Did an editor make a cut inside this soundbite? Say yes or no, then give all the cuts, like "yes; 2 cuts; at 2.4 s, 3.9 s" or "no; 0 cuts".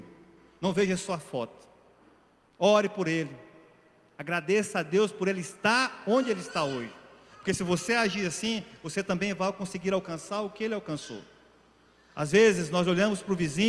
no; 0 cuts